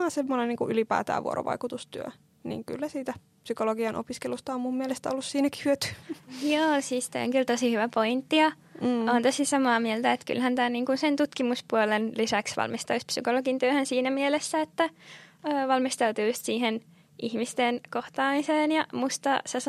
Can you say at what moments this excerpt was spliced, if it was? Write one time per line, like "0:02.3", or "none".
none